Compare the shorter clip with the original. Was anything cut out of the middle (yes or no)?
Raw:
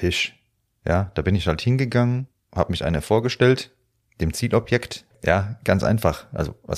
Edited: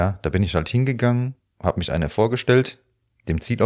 no